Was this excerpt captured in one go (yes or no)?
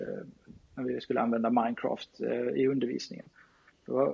yes